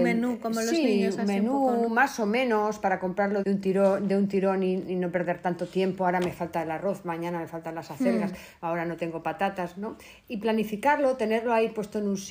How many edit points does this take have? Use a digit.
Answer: 1